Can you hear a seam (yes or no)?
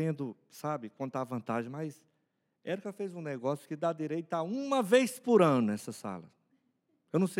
no